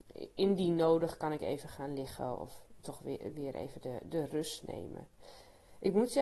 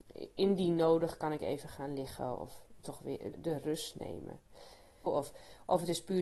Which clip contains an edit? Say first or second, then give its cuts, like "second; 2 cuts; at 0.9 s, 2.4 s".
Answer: second; 2 cuts; at 3.3 s, 5.1 s